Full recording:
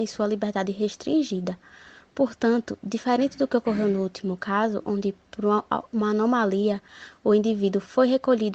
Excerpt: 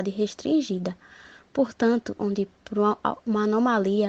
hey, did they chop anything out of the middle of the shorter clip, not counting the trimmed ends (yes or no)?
yes